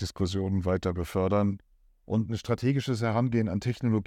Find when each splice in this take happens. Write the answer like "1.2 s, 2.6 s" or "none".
1.9 s